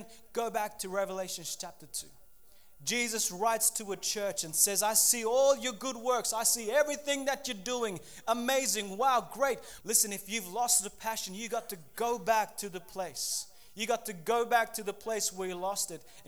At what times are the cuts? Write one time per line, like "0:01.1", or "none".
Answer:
0:09.8